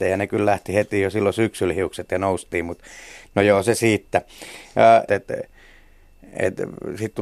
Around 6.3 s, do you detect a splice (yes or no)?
no